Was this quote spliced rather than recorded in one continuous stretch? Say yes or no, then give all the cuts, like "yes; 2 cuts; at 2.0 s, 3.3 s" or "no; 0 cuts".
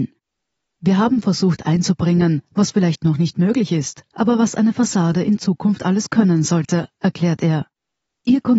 no; 0 cuts